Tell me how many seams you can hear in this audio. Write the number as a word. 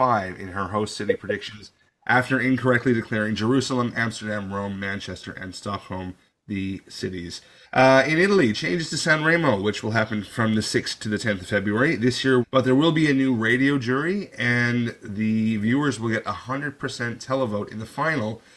two